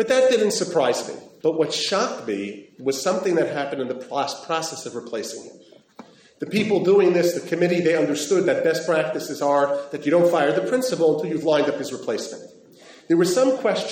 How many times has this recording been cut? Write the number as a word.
one